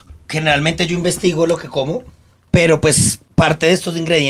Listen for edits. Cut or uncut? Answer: uncut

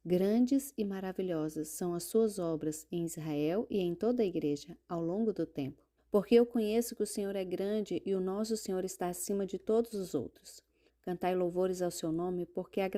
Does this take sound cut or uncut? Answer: cut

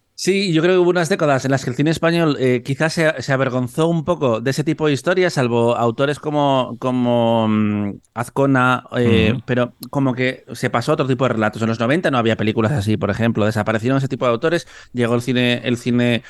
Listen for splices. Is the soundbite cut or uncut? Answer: uncut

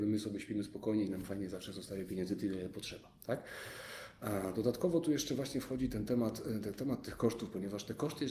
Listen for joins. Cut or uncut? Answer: uncut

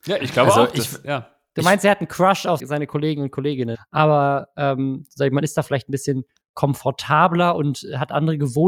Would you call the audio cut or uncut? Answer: cut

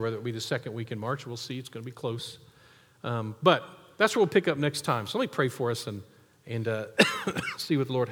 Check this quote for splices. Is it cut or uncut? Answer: uncut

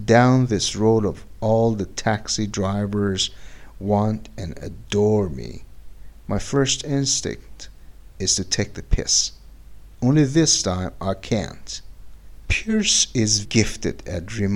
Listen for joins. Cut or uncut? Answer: cut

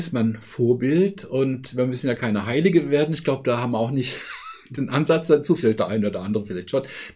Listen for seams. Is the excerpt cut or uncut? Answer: uncut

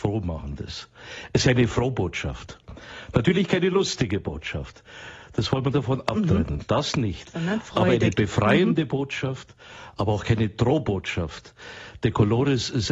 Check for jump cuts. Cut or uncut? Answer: uncut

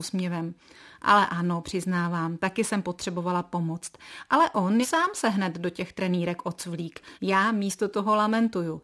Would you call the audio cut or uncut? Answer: cut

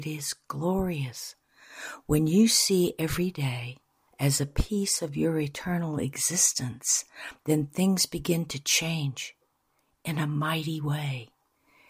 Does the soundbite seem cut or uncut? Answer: cut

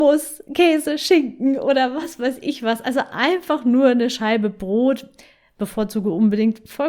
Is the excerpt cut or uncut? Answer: uncut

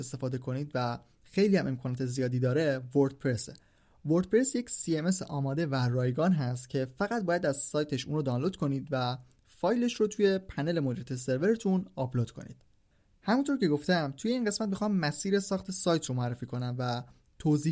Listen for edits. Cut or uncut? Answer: uncut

